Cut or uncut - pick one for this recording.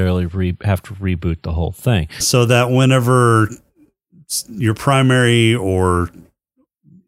cut